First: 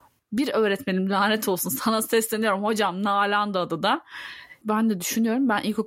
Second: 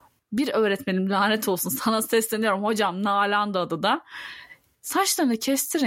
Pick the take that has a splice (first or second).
first